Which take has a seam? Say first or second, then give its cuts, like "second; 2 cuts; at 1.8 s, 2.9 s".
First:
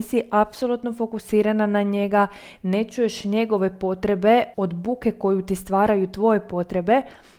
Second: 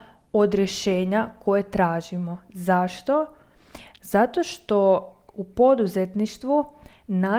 first; 1 cut; at 4.5 s